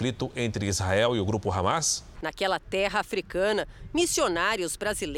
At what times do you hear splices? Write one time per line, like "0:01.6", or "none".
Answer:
0:02.1